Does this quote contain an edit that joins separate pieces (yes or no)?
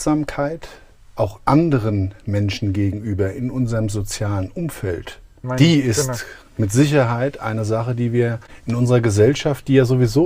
yes